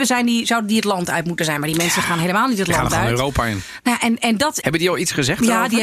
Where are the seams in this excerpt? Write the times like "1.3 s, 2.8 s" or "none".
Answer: 4.6 s